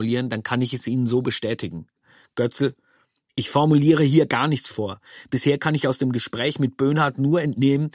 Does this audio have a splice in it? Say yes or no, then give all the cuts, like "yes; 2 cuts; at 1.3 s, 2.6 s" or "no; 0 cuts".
no; 0 cuts